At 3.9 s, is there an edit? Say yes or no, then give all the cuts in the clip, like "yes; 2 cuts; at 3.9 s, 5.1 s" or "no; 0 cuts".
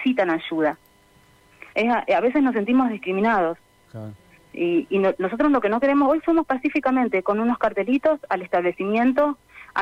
yes; 2 cuts; at 1.7 s, 3.9 s